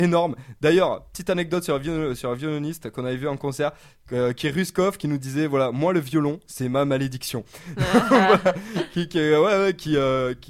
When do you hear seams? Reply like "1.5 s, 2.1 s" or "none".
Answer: none

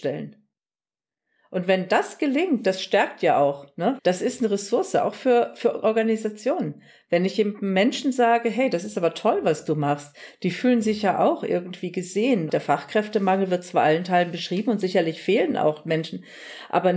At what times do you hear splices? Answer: 4.0 s, 12.5 s

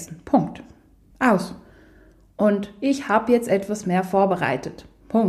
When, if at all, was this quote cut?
1.1 s

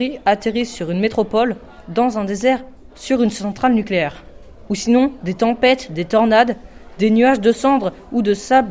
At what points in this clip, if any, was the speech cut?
2.9 s, 4.7 s

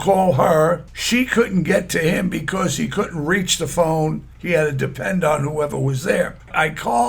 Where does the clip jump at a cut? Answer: 4.3 s

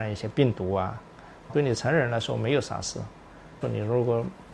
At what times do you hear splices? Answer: 1.5 s, 3.6 s

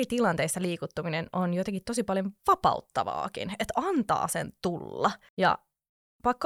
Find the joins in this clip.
5.3 s

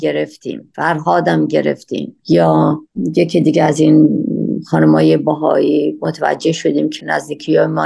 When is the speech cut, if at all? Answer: 2.2 s

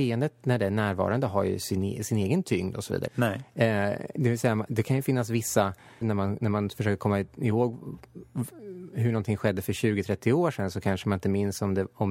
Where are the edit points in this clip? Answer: 3.1 s, 6.0 s

